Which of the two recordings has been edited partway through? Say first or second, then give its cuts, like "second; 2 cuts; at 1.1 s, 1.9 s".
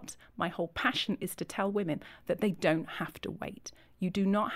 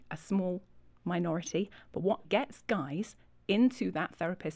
second; 1 cut; at 2.2 s